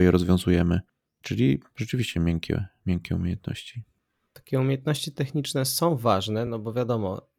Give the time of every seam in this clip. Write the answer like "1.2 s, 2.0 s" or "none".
none